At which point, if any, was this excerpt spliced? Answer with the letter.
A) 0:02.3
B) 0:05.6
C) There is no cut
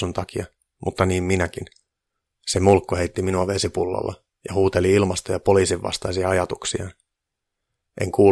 A